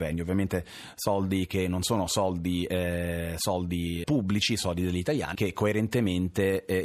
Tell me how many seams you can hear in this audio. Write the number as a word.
two